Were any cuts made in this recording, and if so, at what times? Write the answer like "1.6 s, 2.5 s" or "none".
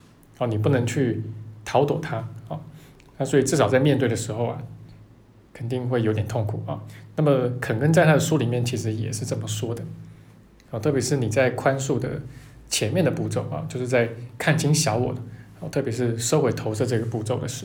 none